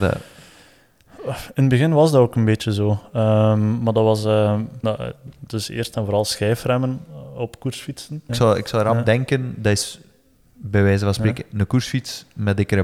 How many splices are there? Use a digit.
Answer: 2